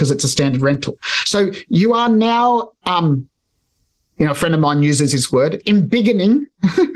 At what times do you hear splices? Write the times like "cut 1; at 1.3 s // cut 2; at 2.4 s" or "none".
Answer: none